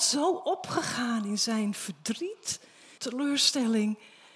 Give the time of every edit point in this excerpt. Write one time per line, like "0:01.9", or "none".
0:03.0